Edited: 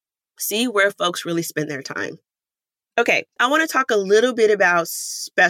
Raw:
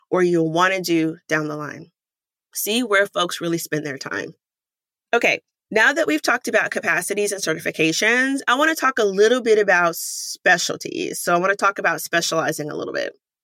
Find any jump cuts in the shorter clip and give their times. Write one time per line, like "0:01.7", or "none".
0:03.4